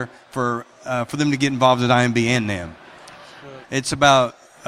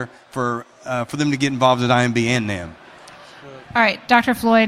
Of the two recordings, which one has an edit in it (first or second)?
first